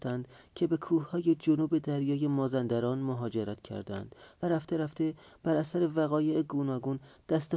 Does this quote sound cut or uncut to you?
uncut